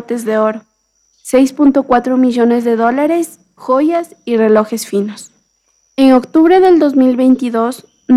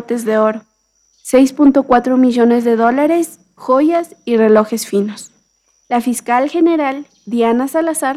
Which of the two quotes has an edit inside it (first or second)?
second